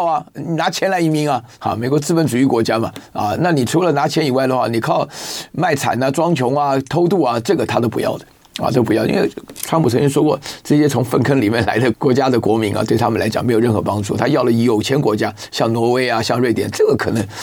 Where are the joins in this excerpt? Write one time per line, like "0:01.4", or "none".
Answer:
0:11.9